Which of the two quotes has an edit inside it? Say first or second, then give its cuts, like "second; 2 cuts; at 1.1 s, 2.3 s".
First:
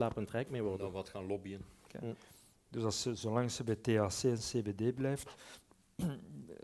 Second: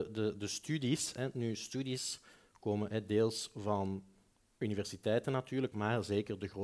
first; 1 cut; at 1.9 s